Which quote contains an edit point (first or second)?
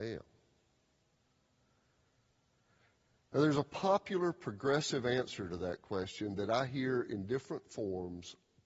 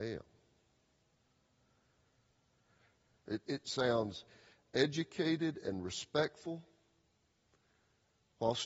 second